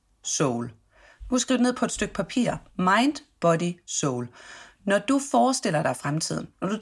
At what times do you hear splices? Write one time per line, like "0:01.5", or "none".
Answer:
none